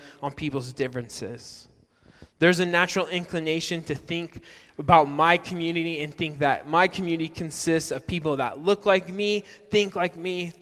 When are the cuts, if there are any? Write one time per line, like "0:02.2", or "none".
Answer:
none